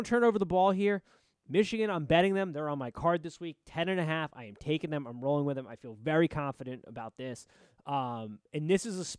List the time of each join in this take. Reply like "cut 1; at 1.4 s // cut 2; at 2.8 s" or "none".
none